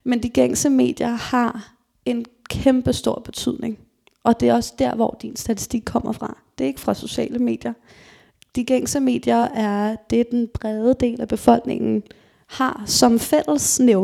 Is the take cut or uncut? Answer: uncut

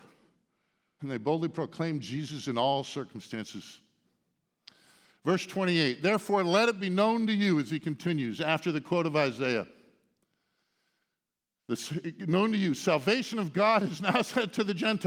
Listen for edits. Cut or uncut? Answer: cut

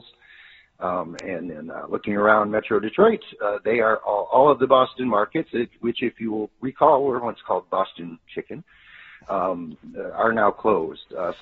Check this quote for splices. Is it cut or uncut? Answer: uncut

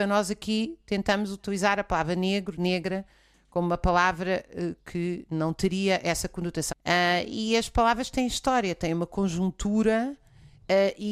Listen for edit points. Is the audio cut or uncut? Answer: cut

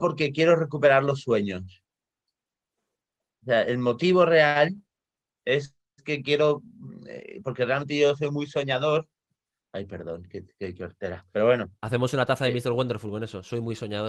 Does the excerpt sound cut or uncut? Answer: uncut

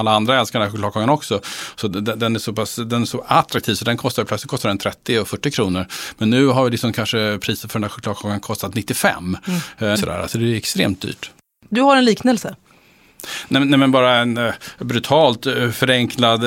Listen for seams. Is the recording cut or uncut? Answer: cut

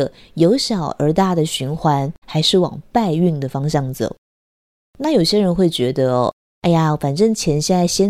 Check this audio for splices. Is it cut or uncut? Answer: cut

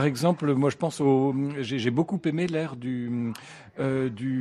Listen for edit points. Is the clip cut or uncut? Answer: uncut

